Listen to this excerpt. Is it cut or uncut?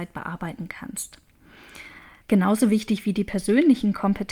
cut